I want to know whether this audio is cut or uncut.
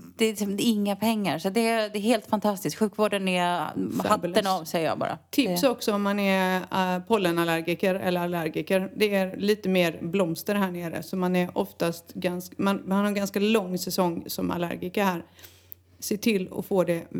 uncut